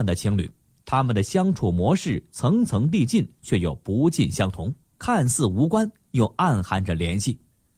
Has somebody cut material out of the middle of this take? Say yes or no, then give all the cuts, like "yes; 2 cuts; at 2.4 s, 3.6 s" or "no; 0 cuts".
no; 0 cuts